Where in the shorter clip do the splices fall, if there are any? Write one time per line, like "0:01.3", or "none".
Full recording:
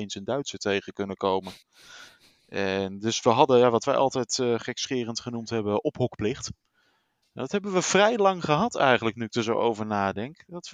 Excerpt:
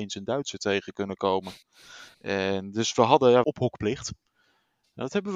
0:02.1
0:03.4